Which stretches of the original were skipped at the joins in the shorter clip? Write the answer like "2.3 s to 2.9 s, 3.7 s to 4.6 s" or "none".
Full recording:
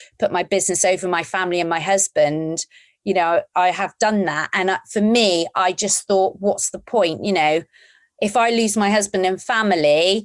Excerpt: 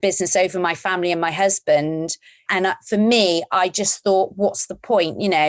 2.9 s to 4.5 s